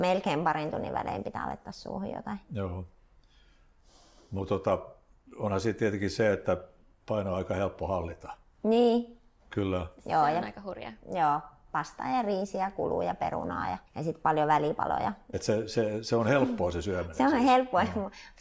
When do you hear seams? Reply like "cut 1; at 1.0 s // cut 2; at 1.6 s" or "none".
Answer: cut 1; at 9.4 s // cut 2; at 13.9 s // cut 3; at 15.3 s